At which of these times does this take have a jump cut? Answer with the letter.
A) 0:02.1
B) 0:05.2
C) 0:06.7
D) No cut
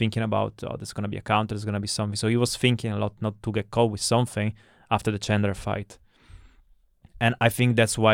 D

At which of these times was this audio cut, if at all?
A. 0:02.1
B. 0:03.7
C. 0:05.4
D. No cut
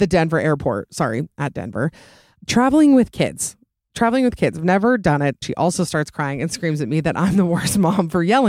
C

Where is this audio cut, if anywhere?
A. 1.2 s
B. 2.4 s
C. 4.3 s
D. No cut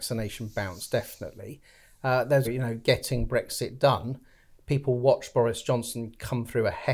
B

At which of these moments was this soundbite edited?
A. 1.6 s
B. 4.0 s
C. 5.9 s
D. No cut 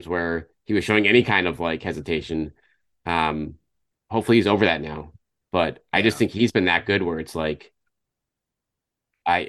D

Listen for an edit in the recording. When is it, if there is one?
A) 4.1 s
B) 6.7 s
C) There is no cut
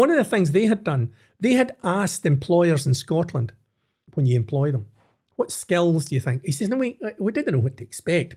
A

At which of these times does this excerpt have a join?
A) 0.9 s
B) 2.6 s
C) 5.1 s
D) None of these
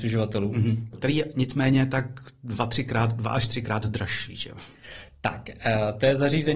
A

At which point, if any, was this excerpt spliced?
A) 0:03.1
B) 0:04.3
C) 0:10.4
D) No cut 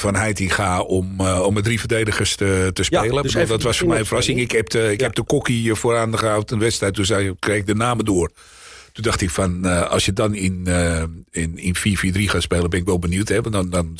D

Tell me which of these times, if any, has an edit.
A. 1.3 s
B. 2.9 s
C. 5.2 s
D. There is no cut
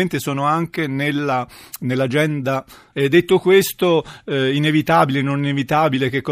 B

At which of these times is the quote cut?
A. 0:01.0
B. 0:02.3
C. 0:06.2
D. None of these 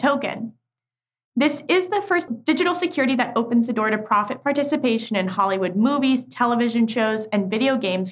B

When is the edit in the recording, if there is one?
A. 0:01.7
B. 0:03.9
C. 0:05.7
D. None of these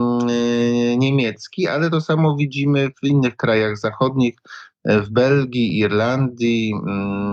D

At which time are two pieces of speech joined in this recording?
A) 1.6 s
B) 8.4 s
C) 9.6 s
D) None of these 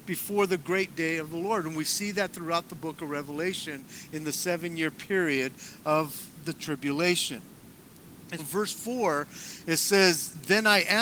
B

